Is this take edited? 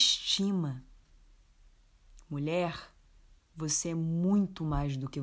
no; 0 cuts

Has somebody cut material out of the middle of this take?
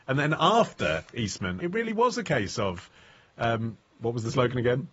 no; 0 cuts

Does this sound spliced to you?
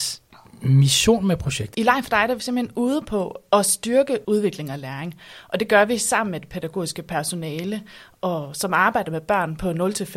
yes; 2 cuts; at 1.7 s, 4.2 s

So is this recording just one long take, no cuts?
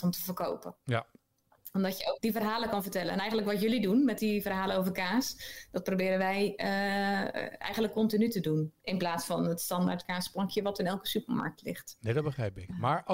no; 2 cuts; at 2.2 s, 8.8 s

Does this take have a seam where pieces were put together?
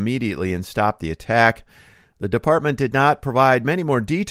no; 0 cuts

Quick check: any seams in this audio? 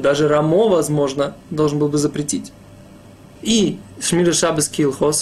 yes; 1 cut; at 3.4 s

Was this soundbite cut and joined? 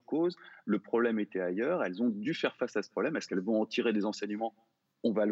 no; 0 cuts

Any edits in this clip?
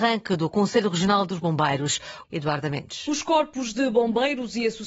yes; 1 cut; at 2.2 s

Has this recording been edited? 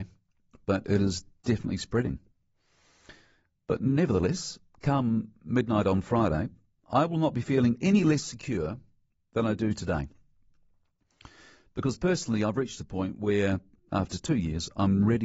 no; 0 cuts

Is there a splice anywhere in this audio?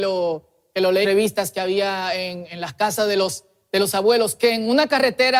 yes; 1 cut; at 1.0 s

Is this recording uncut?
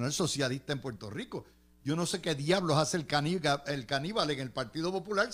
yes; 0 cuts

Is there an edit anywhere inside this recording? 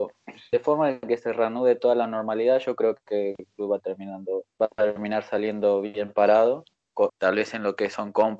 yes; 1 cut; at 7.1 s

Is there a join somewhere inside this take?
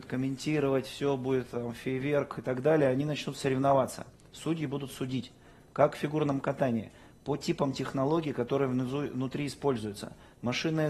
no; 0 cuts

